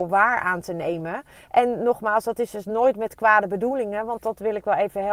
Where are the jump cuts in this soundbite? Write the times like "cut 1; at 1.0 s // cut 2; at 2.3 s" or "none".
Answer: none